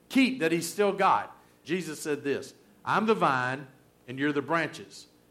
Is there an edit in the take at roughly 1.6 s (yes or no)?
yes